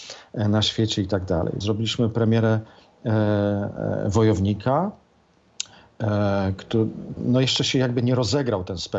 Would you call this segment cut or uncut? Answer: cut